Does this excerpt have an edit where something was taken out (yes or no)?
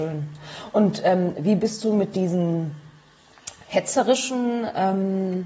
no